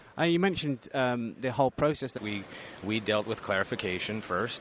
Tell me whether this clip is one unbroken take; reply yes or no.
no